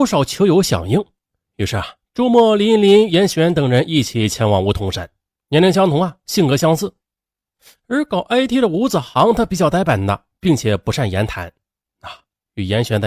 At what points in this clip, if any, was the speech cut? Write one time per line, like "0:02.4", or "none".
0:05.4